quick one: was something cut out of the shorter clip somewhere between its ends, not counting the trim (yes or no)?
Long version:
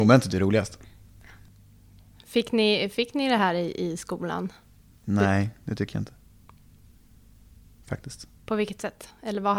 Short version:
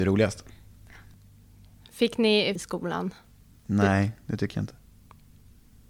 yes